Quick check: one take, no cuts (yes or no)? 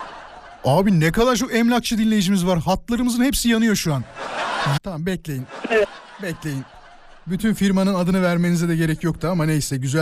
no